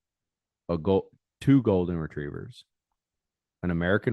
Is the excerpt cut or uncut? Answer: uncut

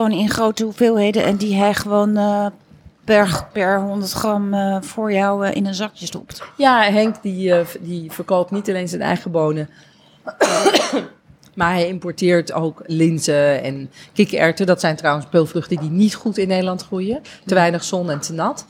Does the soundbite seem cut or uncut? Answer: uncut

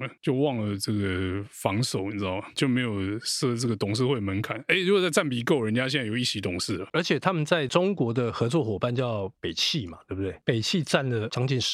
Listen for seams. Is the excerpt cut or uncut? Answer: uncut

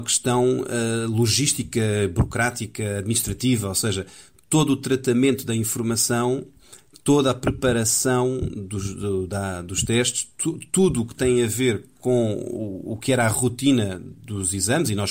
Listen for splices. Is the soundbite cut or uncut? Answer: uncut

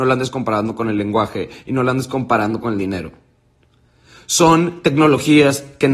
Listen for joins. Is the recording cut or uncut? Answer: uncut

